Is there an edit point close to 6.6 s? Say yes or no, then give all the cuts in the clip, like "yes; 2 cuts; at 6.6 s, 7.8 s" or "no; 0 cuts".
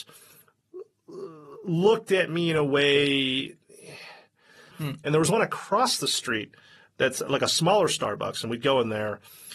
no; 1 cut; at 4.7 s